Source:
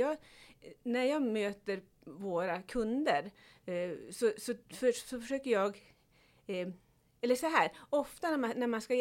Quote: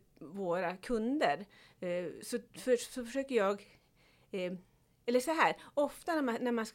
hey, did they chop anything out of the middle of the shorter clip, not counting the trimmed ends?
yes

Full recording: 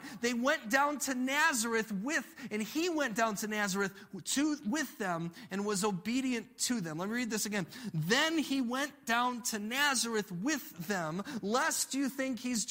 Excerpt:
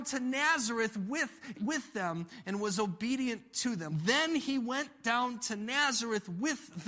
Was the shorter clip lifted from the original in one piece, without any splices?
no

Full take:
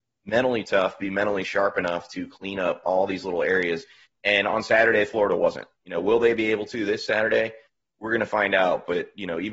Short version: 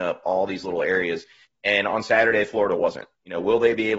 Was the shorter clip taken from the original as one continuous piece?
yes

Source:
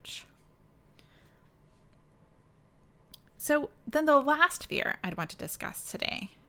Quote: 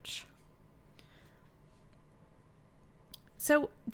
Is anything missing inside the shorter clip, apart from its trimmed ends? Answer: no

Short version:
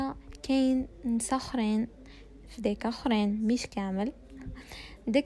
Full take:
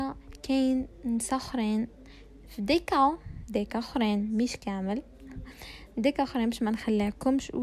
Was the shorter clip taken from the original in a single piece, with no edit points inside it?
no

